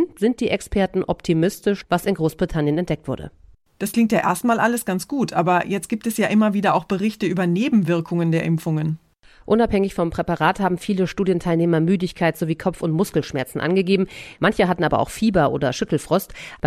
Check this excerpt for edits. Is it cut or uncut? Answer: cut